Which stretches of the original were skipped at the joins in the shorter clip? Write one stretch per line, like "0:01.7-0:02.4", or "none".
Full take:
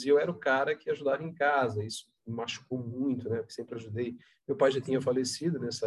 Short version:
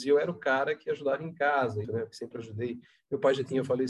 0:01.8-0:03.2